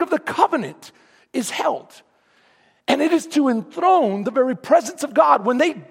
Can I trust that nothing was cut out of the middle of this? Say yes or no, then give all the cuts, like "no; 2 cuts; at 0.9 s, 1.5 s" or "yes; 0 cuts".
yes; 0 cuts